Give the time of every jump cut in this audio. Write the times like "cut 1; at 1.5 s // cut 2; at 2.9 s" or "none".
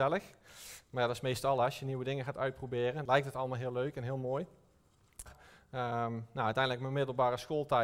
cut 1; at 3.1 s // cut 2; at 5.3 s